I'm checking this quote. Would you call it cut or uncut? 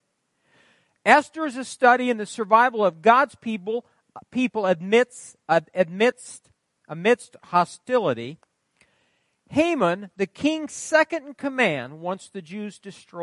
uncut